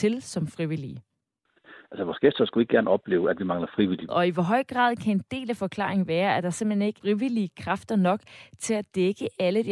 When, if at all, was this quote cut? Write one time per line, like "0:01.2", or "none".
0:04.1
0:07.0